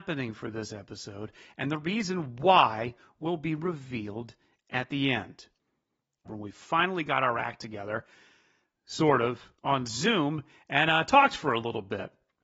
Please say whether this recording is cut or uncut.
cut